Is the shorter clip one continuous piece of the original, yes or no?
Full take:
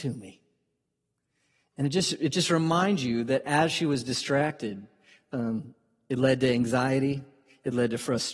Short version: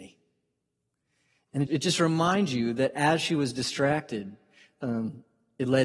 no